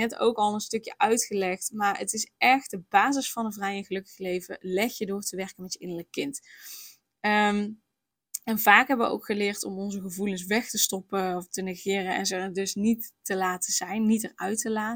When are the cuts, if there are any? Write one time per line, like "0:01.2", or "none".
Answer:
none